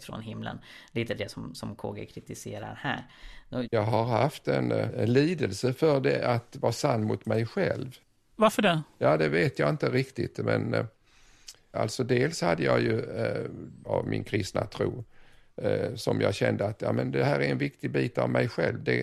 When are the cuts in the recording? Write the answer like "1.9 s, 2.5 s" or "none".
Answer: 3.6 s, 11.7 s, 13.8 s